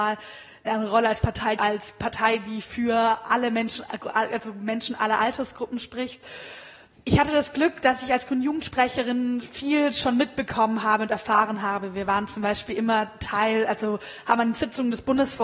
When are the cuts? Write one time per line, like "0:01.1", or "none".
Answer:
0:01.6
0:06.9